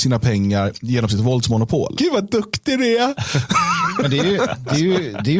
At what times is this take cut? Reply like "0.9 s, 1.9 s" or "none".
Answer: 2.0 s